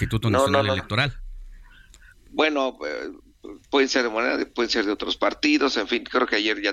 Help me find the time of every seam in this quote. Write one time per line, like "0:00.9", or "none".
none